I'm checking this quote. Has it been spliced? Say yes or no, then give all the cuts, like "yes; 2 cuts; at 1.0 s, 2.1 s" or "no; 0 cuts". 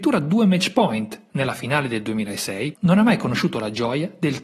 yes; 1 cut; at 2.7 s